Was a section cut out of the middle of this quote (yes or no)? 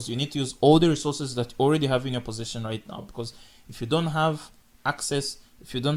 no